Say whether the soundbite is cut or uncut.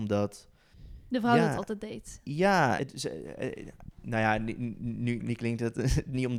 cut